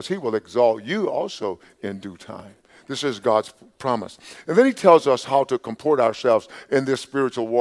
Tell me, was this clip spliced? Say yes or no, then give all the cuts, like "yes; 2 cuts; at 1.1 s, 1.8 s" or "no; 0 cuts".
no; 0 cuts